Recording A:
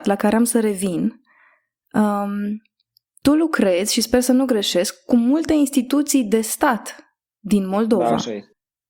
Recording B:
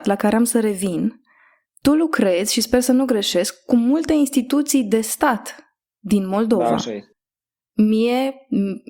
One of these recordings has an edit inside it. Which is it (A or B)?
B